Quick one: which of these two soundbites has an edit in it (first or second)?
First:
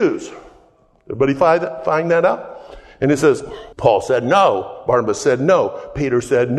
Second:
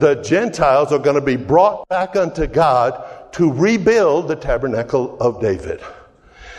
first